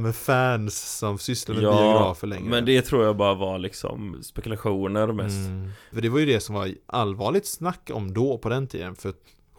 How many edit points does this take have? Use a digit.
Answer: 2